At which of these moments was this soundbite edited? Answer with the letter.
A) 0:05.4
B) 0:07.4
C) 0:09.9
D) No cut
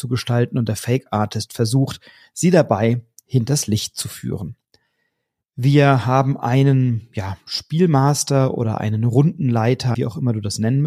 C